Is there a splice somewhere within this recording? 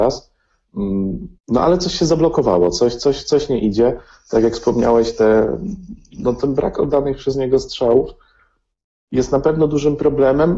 yes; 1 cut; at 1.4 s

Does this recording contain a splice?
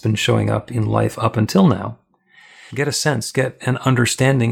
yes; 1 cut; at 2.7 s

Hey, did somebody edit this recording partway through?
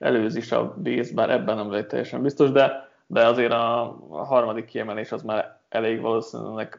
no; 0 cuts

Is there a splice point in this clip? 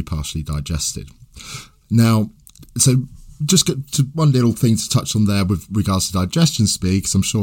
yes; 2 cuts; at 2.7 s, 4.1 s

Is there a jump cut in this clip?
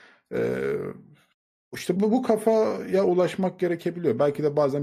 yes; 1 cut; at 2.0 s

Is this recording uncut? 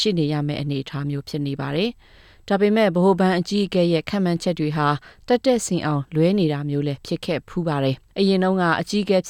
no; 1 cut; at 8.1 s

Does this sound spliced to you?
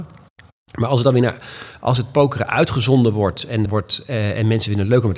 yes; 1 cut; at 3.6 s

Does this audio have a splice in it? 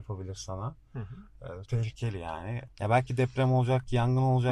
yes; 2 cuts; at 1.6 s, 2.7 s

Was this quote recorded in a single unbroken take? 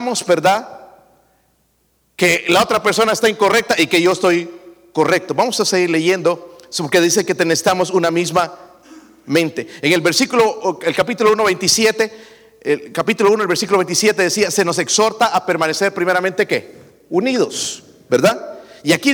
yes; 0 cuts

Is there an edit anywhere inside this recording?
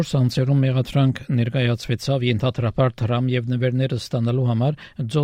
no; 0 cuts

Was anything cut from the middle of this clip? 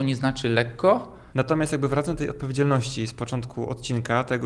yes; 1 cut; at 1.3 s

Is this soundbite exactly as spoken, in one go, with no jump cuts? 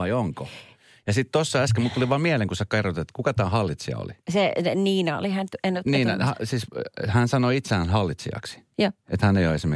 yes; 0 cuts

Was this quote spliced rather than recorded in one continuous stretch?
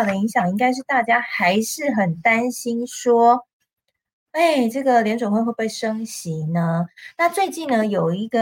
no; 0 cuts

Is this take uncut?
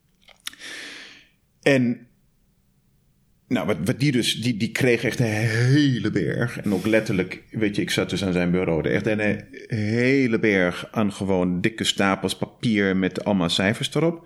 yes; 0 cuts

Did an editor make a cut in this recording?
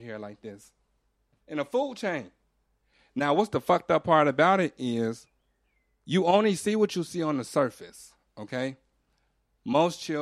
no; 0 cuts

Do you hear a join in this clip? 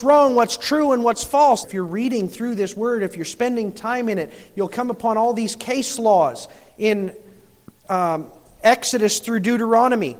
yes; 1 cut; at 1.6 s

